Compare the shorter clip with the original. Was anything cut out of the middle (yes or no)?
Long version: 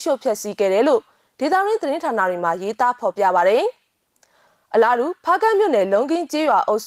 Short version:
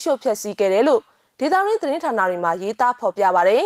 no